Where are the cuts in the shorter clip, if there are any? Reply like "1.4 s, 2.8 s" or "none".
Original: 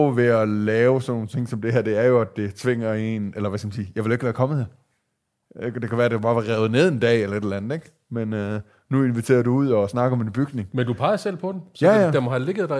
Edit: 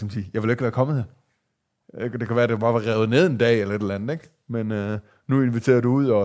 none